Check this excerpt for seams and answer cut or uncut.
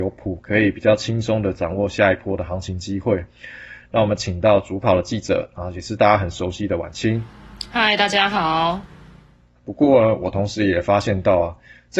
cut